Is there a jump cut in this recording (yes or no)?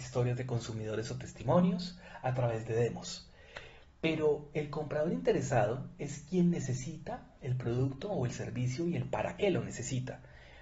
no